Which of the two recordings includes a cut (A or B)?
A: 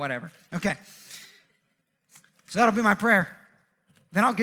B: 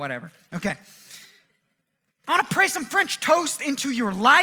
B